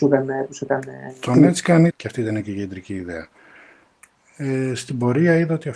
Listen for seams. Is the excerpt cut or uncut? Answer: cut